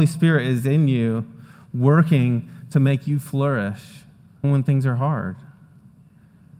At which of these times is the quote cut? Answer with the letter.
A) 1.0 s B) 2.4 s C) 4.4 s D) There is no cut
C